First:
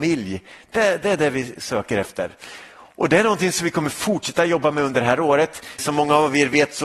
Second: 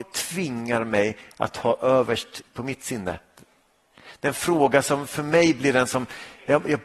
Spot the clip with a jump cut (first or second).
first